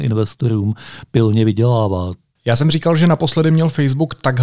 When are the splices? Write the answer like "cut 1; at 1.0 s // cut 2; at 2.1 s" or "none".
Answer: cut 1; at 2.4 s